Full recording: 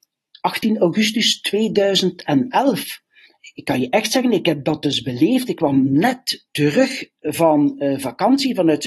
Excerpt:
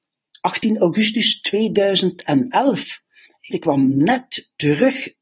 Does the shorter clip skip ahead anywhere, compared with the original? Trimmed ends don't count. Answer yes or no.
yes